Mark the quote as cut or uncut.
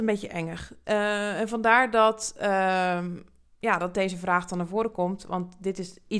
uncut